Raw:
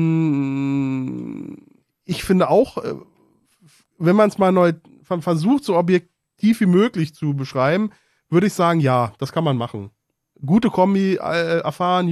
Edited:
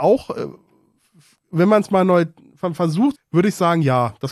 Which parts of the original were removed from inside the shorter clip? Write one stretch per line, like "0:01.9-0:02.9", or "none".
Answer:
0:05.6-0:08.1